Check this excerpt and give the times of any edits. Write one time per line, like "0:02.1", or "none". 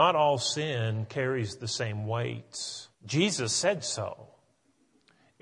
0:02.9